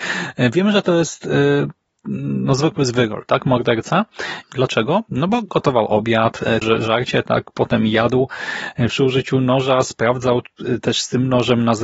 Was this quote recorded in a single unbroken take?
no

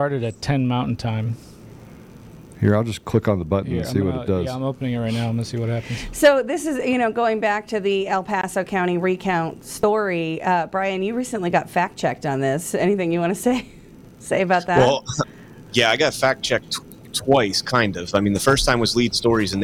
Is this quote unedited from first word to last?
yes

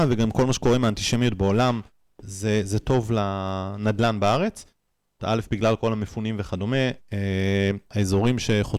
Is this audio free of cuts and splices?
no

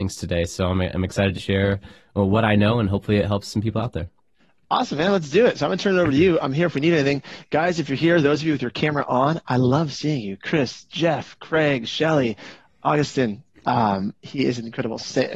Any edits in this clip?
yes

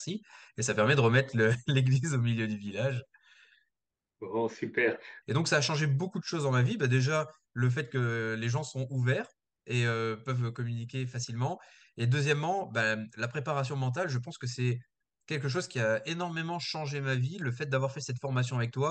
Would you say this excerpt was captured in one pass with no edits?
no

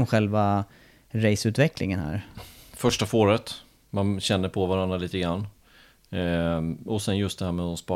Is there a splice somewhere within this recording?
no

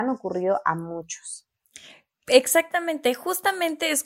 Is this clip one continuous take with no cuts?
yes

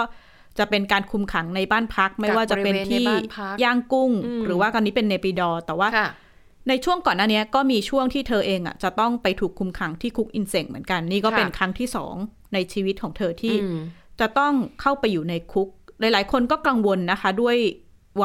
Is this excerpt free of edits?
yes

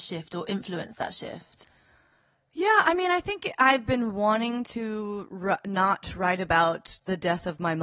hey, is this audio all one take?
yes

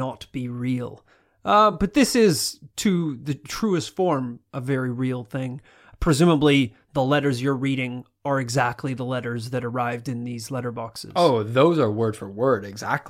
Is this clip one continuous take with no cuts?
yes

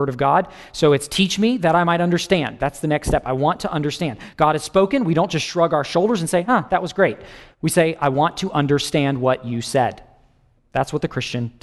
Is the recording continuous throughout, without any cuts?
yes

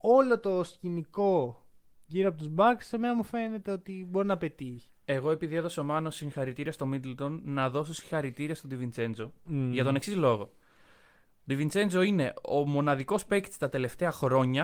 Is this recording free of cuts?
no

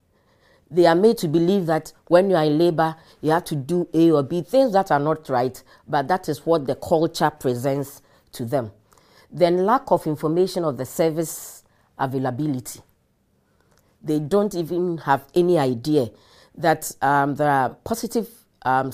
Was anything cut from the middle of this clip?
no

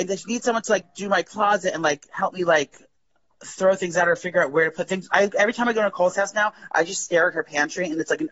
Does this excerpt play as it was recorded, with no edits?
yes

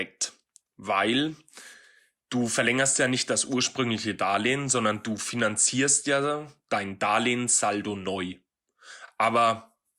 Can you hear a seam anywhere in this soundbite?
no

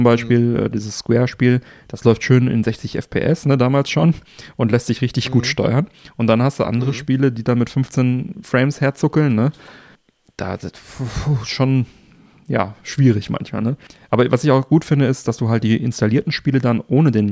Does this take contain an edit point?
no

